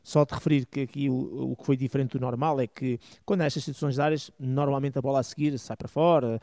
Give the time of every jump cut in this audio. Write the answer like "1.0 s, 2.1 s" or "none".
none